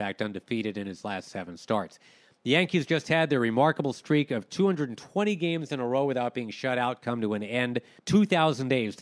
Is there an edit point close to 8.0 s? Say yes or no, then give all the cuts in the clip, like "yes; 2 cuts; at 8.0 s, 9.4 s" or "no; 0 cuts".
yes; 1 cut; at 8.0 s